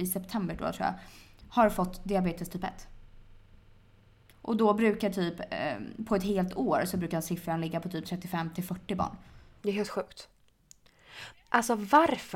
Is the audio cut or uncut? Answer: cut